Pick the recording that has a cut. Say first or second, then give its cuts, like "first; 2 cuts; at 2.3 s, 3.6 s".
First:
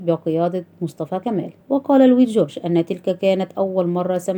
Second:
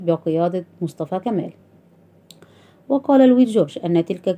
first; 1 cut; at 1.6 s